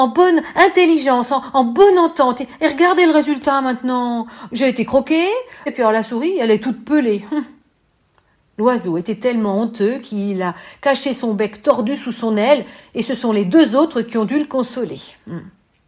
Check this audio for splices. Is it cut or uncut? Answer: cut